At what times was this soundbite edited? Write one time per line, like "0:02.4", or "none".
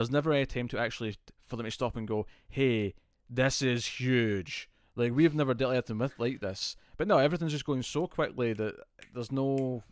none